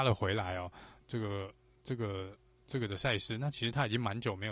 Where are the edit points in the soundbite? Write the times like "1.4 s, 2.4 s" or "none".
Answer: 1.0 s

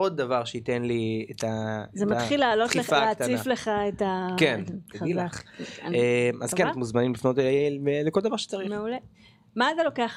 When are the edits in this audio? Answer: 4.9 s

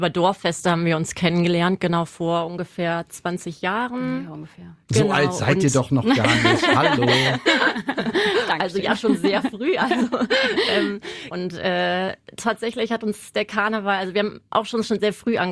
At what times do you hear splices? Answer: 11.3 s

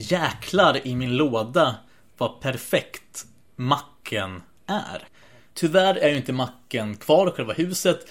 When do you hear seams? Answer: 5.5 s

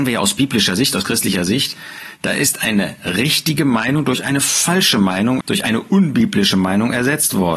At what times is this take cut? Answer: 5.4 s

